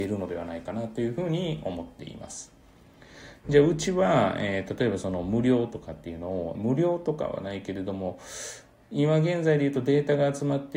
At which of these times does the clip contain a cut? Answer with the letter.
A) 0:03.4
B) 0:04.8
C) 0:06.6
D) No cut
C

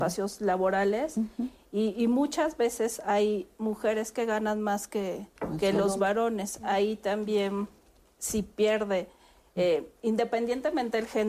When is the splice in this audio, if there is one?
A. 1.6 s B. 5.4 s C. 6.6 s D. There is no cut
B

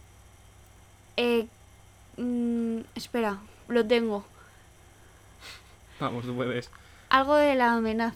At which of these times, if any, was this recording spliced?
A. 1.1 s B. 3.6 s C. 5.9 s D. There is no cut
B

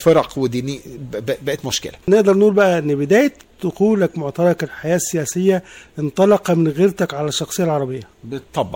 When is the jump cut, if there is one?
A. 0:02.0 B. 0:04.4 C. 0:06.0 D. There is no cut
A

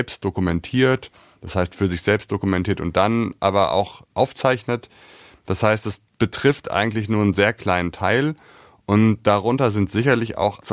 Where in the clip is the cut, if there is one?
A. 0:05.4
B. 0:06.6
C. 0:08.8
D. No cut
D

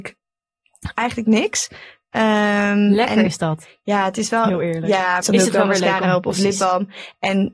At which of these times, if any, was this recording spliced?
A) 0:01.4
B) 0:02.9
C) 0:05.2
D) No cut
C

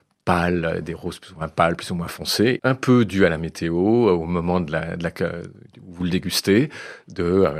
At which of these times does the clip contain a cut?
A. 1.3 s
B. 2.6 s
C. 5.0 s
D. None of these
B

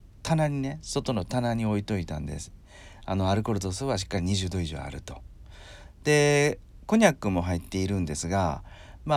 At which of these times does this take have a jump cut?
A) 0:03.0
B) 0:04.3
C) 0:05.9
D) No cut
D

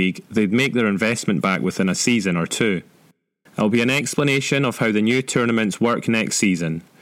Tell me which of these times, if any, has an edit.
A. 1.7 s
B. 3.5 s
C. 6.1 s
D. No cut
B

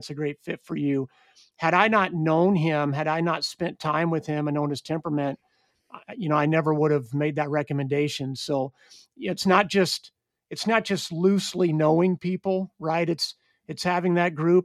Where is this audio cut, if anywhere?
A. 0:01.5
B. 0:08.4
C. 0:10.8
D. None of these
D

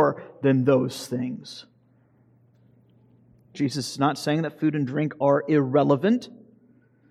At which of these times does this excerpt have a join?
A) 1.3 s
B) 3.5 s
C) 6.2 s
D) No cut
B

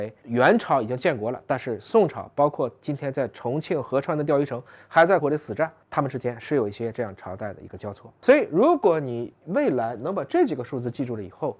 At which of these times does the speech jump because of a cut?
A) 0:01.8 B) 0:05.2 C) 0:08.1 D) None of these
B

